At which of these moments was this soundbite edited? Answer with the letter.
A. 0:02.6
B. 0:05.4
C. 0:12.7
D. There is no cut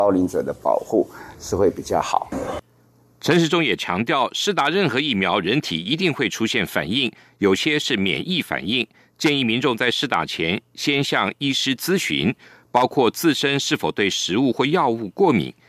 D